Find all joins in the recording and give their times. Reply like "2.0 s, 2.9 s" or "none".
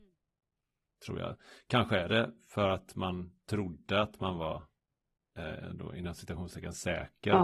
none